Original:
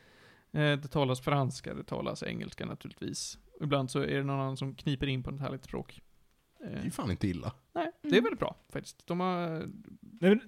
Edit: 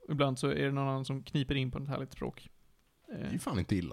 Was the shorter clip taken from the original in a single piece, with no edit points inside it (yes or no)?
yes